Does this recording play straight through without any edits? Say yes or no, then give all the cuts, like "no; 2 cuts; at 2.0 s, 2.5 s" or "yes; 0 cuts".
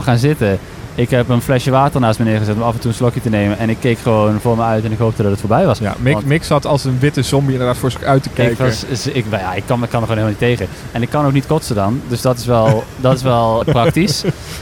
no; 1 cut; at 13.6 s